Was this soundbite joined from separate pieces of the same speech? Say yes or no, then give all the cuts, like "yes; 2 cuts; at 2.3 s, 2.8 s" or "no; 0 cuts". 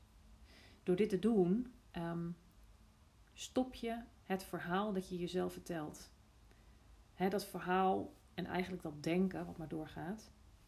yes; 1 cut; at 7.1 s